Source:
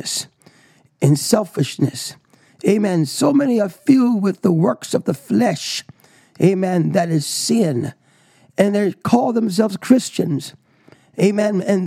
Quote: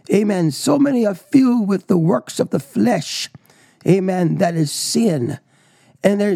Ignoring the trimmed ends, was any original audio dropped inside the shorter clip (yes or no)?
no